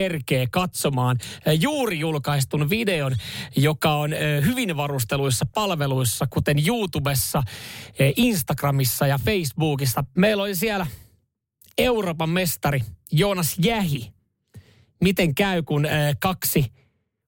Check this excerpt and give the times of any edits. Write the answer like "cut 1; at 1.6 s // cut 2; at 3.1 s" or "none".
cut 1; at 10.2 s